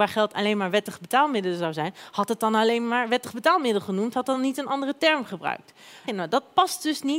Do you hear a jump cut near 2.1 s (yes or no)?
no